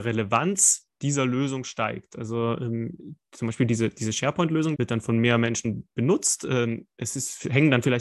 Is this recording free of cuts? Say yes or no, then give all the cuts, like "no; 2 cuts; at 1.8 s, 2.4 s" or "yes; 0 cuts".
no; 1 cut; at 4.7 s